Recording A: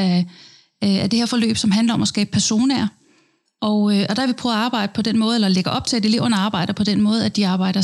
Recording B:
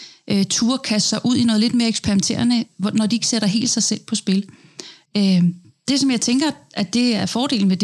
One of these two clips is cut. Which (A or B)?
B